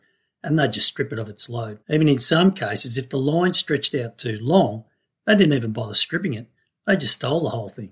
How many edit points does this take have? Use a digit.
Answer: 1